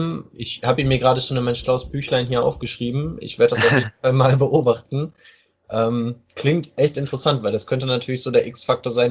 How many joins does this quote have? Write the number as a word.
zero